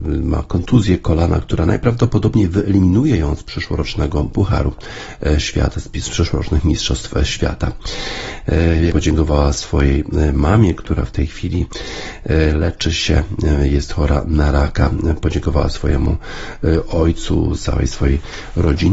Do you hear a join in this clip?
yes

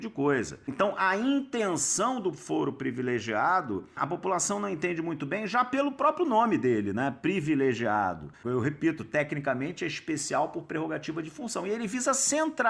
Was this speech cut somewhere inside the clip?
no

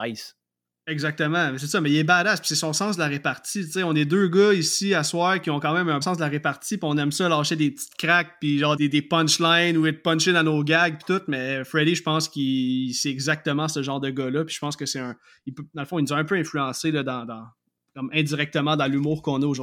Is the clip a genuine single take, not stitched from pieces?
no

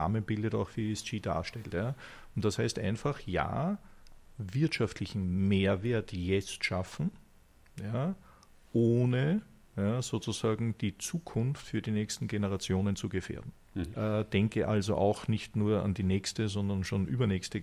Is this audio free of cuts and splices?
no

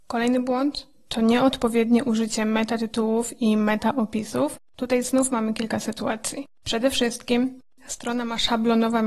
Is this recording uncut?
yes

